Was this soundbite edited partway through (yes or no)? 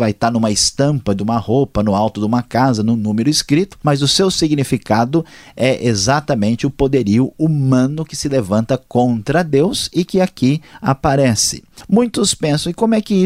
no